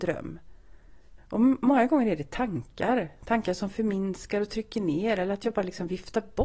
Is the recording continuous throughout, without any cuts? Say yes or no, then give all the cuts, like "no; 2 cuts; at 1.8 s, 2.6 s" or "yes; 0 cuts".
no; 1 cut; at 1.2 s